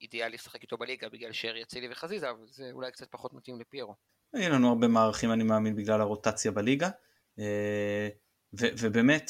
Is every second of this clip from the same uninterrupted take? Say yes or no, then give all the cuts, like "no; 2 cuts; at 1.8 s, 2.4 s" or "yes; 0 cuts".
yes; 0 cuts